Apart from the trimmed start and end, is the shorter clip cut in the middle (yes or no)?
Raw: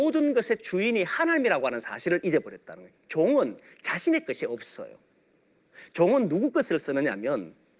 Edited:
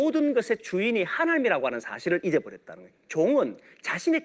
no